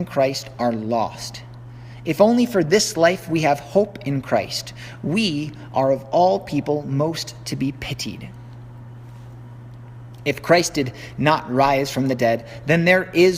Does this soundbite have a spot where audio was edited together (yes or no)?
no